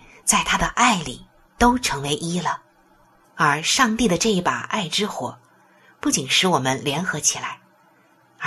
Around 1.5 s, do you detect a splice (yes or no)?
no